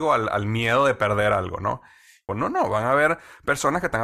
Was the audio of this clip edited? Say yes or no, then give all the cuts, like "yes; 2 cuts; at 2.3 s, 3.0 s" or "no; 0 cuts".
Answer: yes; 1 cut; at 2.3 s